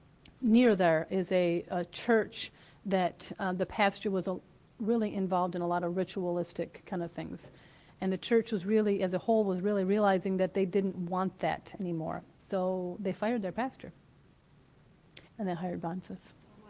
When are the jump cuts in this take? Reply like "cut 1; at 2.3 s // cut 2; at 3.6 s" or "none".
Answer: cut 1; at 12.3 s // cut 2; at 15.3 s